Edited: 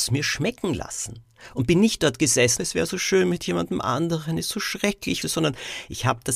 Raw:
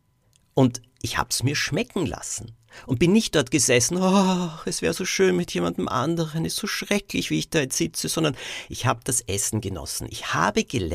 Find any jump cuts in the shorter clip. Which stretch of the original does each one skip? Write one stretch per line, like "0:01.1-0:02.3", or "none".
0:03.9-0:04.6
0:07.3-0:08.0